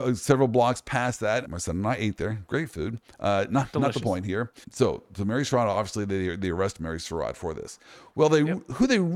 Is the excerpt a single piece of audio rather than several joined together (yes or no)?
no